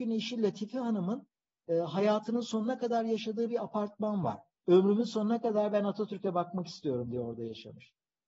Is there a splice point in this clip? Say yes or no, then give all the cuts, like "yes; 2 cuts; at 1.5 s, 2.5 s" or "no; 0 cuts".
yes; 1 cut; at 4.6 s